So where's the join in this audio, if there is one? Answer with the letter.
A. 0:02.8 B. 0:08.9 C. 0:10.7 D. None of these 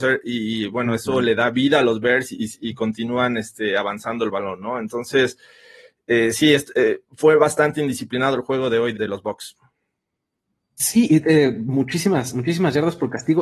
B